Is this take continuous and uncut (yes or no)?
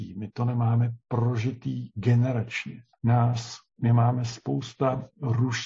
no